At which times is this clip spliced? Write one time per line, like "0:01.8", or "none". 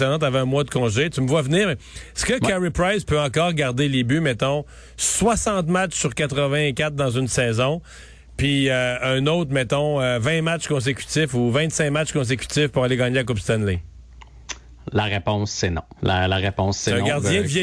0:16.0